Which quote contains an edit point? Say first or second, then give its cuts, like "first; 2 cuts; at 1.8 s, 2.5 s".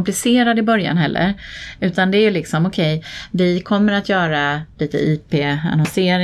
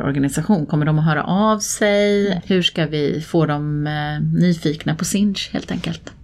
second; 1 cut; at 2.4 s